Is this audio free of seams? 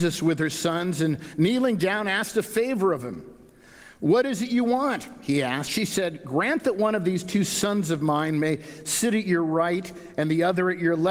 yes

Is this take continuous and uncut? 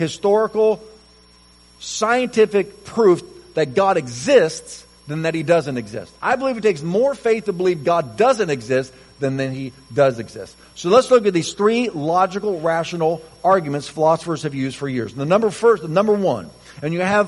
yes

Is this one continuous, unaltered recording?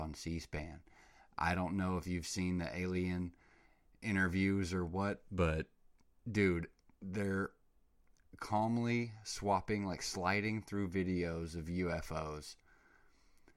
yes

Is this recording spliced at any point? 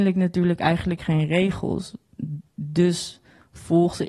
no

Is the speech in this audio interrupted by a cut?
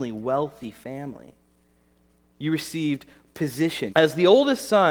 yes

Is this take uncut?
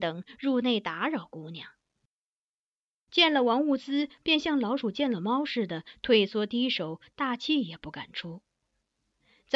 no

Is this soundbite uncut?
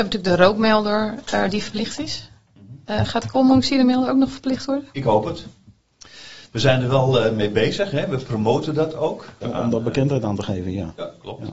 no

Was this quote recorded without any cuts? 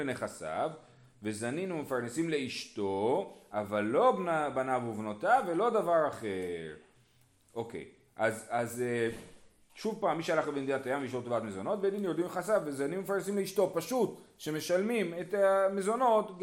yes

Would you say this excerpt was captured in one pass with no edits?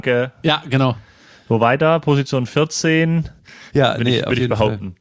no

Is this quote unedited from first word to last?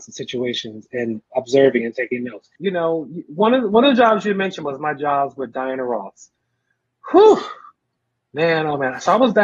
no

